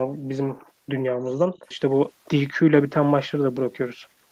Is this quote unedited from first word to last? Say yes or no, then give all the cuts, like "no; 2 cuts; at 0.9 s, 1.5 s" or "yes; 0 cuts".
no; 1 cut; at 1.7 s